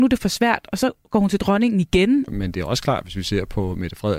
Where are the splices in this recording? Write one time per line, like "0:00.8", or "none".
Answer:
0:02.3

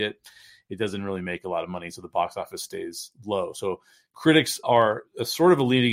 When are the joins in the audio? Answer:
0:04.6

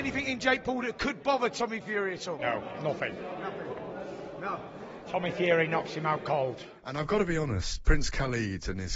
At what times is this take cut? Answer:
none

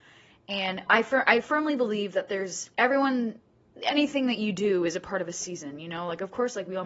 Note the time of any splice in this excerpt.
0:02.7

